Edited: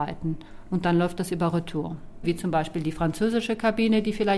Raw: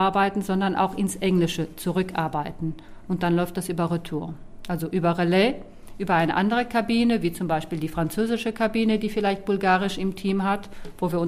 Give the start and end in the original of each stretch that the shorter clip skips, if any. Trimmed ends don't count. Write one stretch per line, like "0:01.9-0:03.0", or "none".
0:04.6-0:07.2